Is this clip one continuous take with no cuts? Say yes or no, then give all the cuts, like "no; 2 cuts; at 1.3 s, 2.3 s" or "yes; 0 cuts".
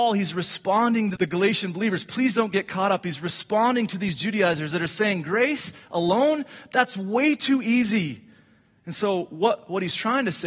no; 1 cut; at 1.2 s